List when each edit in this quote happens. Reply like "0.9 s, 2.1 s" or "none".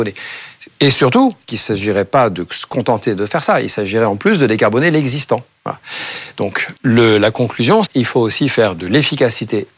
6.8 s, 7.9 s